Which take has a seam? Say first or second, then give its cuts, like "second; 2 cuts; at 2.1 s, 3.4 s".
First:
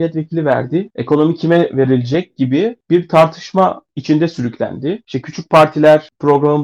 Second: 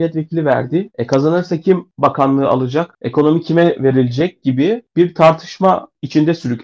first; 1 cut; at 0.9 s